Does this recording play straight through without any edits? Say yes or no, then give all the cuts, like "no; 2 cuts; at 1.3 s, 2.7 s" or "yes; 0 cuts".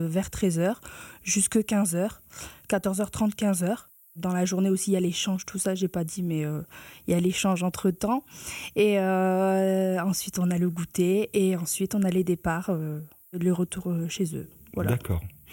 yes; 0 cuts